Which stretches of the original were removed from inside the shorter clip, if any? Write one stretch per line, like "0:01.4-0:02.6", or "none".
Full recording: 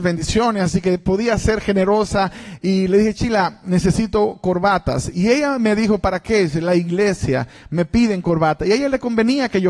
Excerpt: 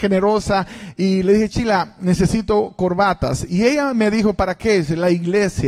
none